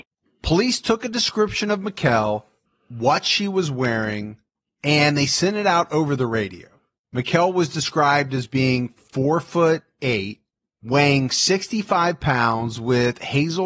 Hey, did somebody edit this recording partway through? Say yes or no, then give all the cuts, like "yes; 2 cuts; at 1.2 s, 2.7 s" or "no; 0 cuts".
no; 0 cuts